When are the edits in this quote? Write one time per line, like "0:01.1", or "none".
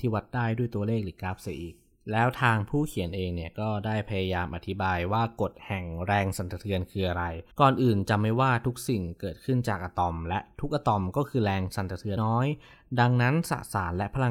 0:07.5
0:12.2

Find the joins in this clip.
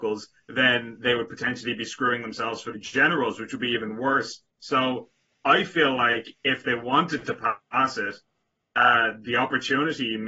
none

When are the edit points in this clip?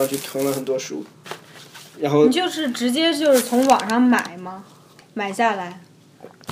none

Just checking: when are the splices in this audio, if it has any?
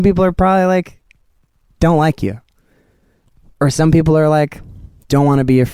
none

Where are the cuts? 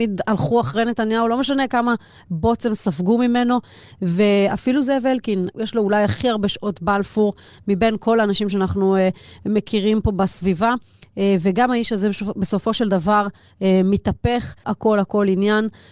0:05.5
0:14.6

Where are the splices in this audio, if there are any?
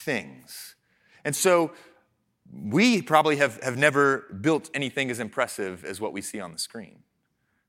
none

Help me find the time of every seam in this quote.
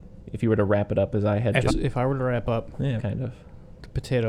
0:01.7
0:03.0

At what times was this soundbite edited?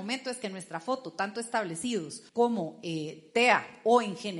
0:02.3

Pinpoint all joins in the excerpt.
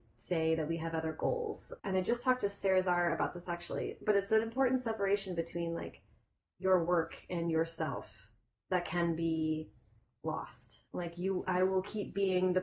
0:01.8

